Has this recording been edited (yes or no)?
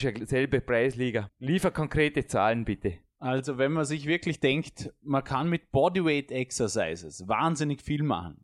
yes